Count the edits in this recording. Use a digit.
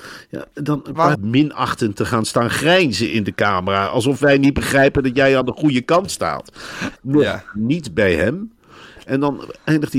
2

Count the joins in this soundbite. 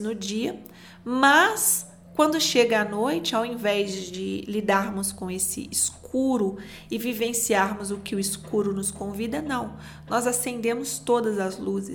0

